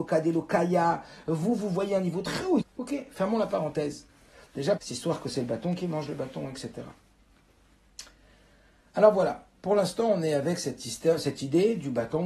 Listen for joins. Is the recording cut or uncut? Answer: cut